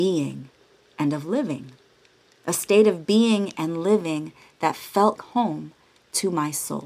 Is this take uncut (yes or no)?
no